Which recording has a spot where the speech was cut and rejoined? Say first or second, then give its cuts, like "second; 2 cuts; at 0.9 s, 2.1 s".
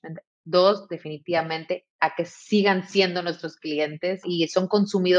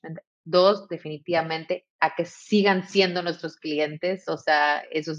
first; 1 cut; at 4.2 s